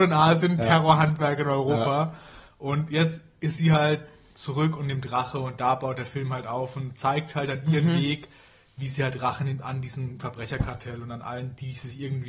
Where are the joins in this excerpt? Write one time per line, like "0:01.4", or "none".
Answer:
none